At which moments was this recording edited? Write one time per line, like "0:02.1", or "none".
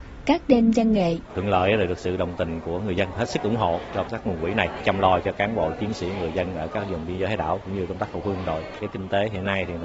0:01.3